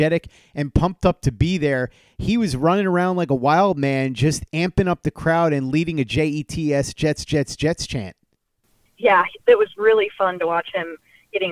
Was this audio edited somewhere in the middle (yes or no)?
no